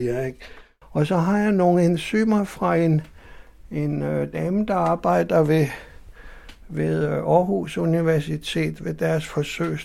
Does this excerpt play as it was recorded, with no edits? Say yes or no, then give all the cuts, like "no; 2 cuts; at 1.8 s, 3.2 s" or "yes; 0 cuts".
yes; 0 cuts